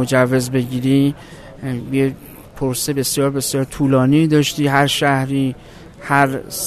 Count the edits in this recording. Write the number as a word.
zero